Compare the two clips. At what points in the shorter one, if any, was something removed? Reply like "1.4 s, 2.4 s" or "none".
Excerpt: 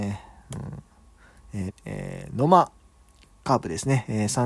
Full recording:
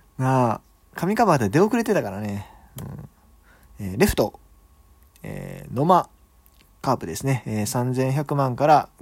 1.7 s